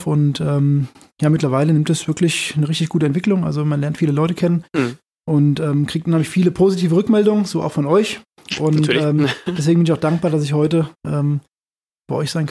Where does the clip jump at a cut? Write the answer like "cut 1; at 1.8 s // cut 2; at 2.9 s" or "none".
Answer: none